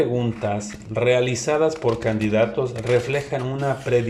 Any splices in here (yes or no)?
no